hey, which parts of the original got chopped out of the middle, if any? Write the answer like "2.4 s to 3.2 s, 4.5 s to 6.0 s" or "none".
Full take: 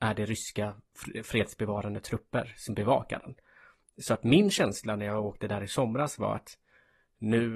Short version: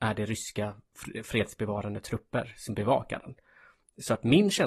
none

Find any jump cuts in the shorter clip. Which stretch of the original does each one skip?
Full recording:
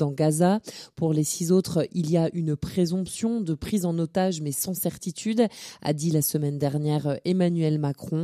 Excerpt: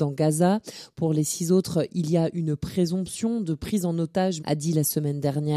4.4 s to 5.8 s

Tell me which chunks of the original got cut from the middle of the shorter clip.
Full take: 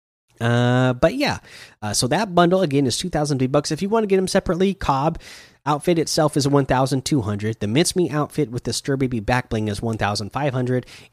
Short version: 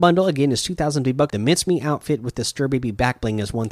3.6 s to 7.6 s

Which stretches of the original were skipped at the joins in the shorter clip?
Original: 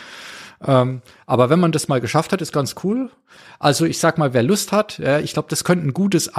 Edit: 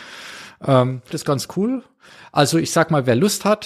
1.1 s to 2.4 s

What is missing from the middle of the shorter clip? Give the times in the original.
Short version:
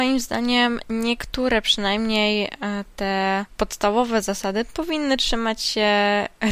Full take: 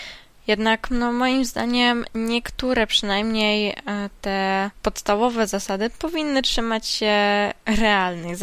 none

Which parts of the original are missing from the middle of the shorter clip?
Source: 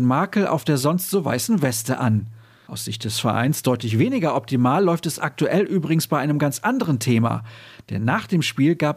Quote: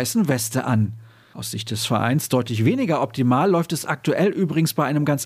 none

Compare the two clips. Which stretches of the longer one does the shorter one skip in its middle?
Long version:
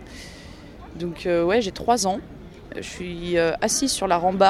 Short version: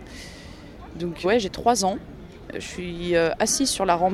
1.2 s to 1.5 s

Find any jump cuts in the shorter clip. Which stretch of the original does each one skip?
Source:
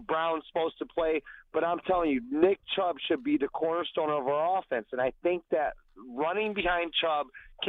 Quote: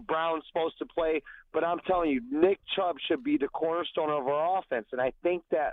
none

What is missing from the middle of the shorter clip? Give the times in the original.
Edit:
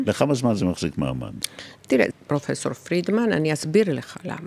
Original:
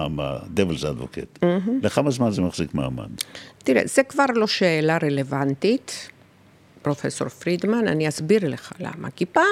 3.9 s to 6.7 s

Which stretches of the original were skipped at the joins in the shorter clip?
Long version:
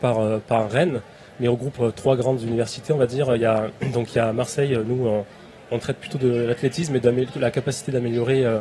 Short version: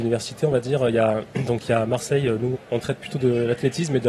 5.0 s to 5.5 s

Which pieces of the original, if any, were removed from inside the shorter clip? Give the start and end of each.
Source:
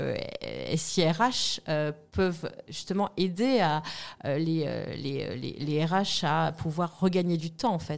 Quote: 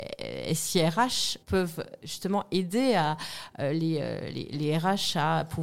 1.6 s to 2.1 s, 5.0 s to 5.4 s

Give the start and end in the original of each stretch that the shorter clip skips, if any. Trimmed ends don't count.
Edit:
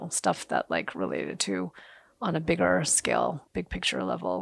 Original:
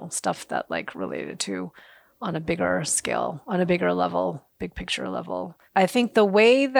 3.4 s to 4.5 s

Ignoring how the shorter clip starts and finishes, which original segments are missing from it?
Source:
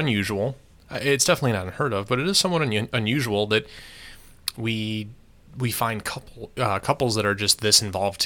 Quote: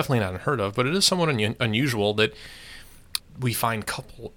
4.5 s to 5.4 s

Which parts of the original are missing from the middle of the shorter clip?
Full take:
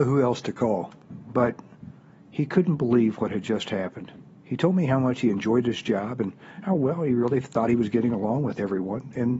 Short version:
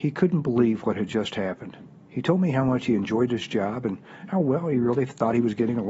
none

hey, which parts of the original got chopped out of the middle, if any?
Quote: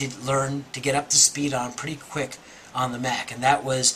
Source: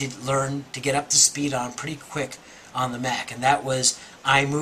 none

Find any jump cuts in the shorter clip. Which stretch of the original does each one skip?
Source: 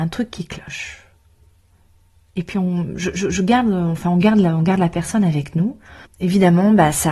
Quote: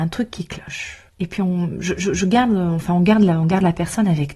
1.1 s to 2.2 s

